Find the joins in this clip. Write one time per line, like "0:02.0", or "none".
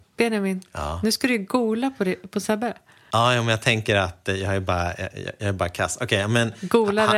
none

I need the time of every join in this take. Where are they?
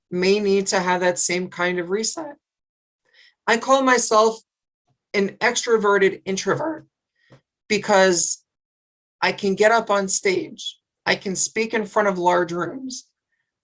none

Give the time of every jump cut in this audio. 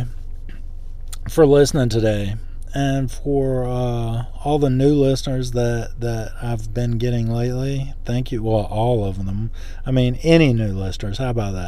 none

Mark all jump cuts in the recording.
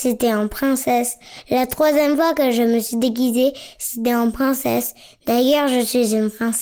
none

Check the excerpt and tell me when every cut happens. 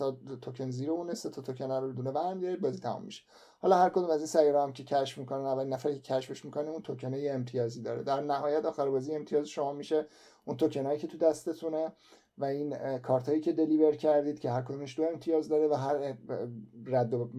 0:01.9

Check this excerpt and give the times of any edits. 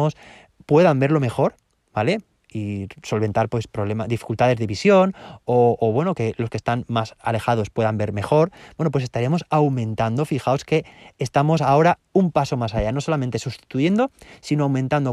none

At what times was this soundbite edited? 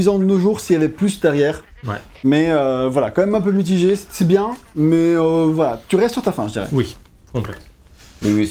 none

